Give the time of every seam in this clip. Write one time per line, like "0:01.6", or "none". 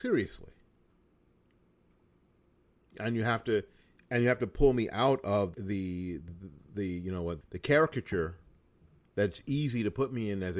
0:05.5
0:07.4